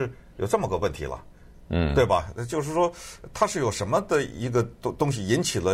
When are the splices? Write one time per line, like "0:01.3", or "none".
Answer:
none